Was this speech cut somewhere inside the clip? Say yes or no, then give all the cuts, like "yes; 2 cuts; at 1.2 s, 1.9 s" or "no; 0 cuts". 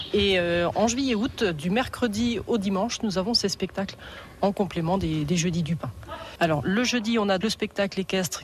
yes; 2 cuts; at 6.4 s, 7.4 s